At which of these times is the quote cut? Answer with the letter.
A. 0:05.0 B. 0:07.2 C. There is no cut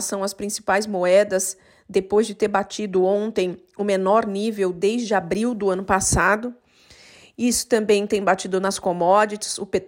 C